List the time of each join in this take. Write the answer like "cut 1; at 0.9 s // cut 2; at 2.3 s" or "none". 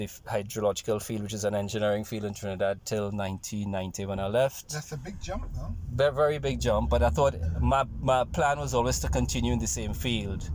none